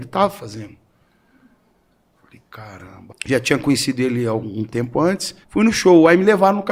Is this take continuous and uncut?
no; 2 cuts; at 3.1 s, 5.4 s

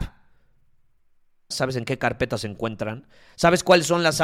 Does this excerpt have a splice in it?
yes; 1 cut; at 1.5 s

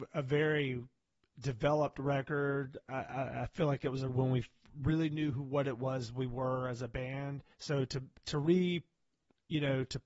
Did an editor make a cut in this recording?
yes; 2 cuts; at 4.1 s, 7.5 s

